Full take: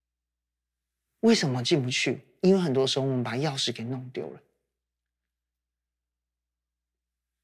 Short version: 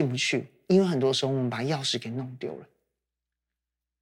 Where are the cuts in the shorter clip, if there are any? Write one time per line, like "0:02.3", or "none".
none